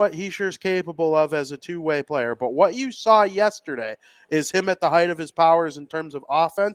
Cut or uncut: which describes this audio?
uncut